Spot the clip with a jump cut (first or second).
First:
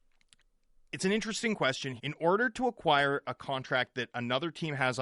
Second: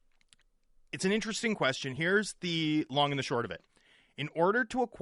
first